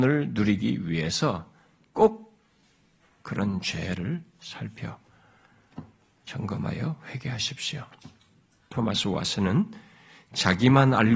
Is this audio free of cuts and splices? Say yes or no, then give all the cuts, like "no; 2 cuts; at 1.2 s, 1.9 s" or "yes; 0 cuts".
yes; 0 cuts